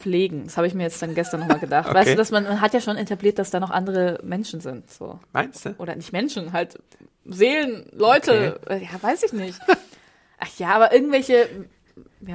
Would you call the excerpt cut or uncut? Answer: uncut